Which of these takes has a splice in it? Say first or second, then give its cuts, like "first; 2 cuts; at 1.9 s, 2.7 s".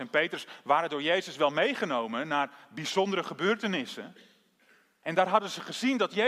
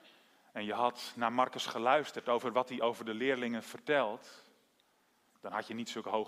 first; 1 cut; at 5.0 s